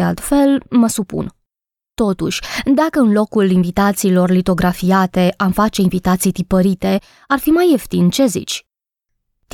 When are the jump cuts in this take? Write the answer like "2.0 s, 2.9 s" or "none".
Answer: none